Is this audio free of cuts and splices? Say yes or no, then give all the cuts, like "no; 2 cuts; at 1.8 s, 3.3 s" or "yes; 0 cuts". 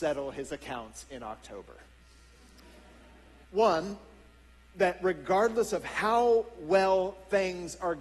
no; 1 cut; at 3.4 s